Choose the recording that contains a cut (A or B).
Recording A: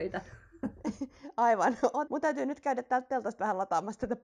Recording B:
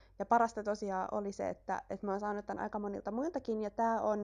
A